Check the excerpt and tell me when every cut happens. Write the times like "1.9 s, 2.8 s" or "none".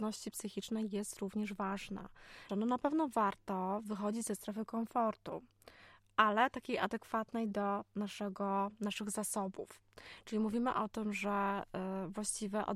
2.5 s, 10.2 s

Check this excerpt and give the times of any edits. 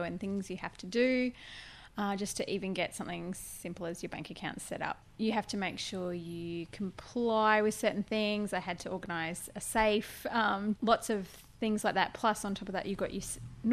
10.8 s

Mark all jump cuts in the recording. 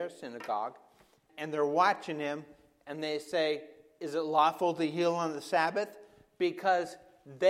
1.3 s

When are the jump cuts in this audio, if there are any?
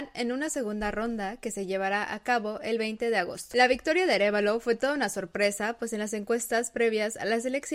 none

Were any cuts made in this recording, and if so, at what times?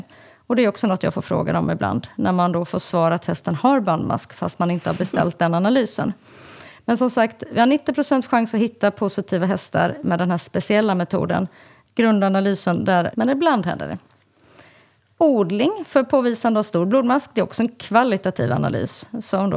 13.1 s

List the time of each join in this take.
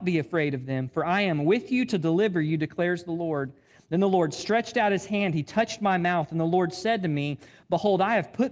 none

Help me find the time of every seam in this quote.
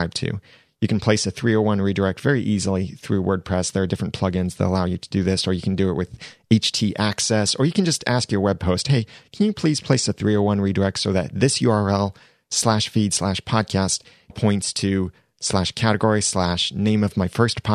14.3 s

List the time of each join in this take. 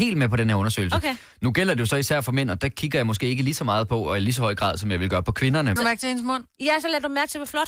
5.8 s

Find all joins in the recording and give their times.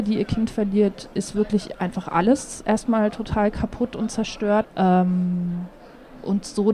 1.1 s, 4.6 s

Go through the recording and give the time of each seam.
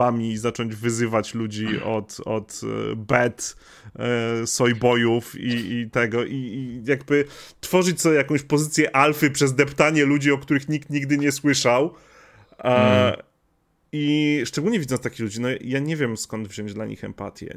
none

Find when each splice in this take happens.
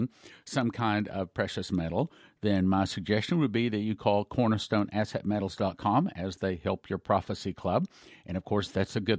none

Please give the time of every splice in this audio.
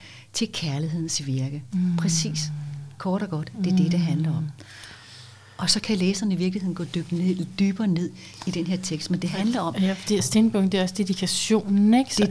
none

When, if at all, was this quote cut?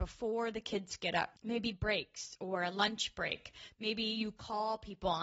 1.4 s

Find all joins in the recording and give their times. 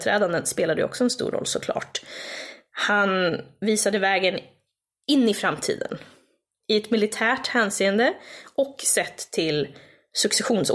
none

